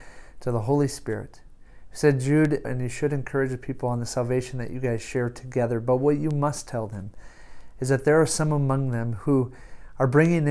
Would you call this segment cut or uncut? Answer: cut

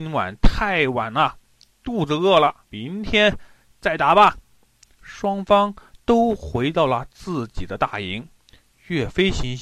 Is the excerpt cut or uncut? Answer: cut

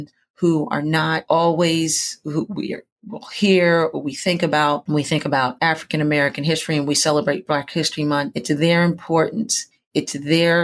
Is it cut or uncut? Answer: uncut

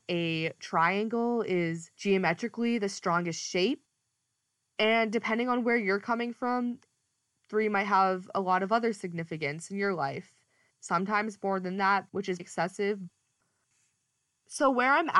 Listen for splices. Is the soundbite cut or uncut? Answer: cut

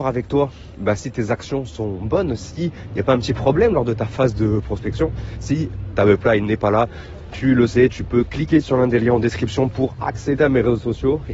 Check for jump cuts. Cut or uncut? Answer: uncut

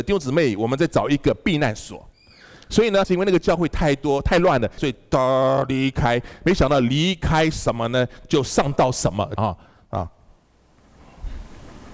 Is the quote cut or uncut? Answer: cut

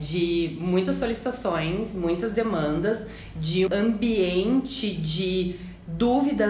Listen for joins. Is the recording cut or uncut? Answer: cut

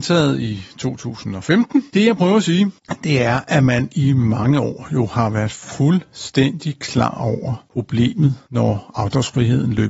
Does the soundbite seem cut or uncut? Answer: cut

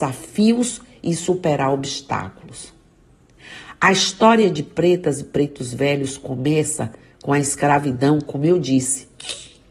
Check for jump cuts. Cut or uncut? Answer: uncut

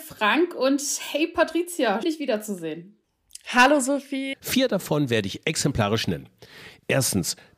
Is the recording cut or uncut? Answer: cut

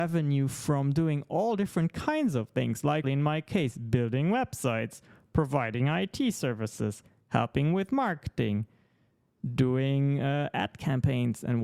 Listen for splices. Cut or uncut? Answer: cut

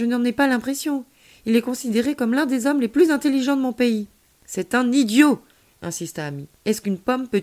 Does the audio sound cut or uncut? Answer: uncut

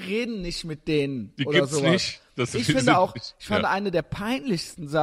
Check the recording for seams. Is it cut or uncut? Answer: uncut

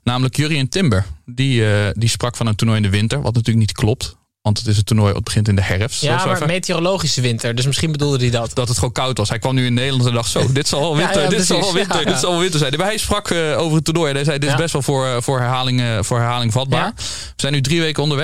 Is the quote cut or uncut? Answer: cut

